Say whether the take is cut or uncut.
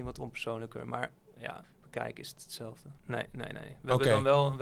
cut